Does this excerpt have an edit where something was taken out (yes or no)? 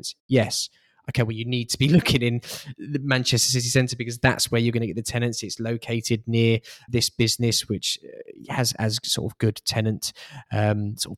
yes